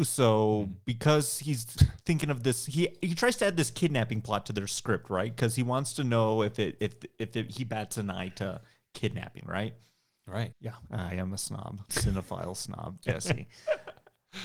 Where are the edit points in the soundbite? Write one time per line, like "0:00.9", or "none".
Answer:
0:10.5
0:11.9